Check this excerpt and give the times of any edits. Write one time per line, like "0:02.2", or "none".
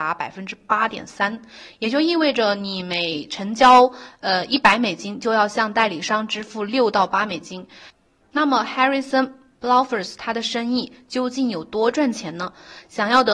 0:08.2